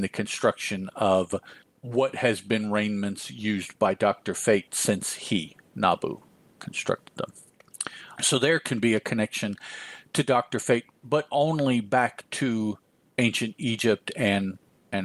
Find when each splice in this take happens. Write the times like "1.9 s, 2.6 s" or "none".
8.2 s